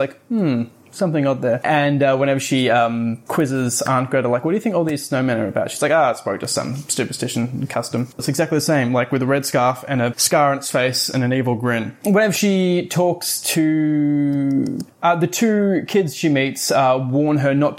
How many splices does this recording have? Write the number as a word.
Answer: one